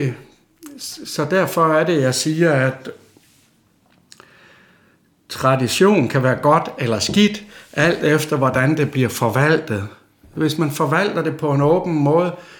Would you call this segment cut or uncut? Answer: uncut